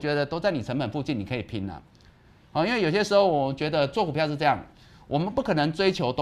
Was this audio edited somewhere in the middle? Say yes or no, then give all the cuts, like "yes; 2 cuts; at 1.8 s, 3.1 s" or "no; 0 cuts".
no; 0 cuts